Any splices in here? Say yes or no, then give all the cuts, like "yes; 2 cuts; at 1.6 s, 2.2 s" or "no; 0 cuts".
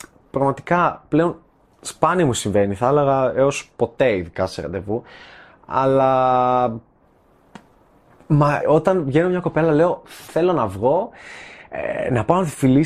yes; 2 cuts; at 8.6 s, 10.3 s